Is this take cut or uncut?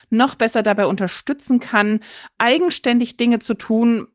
uncut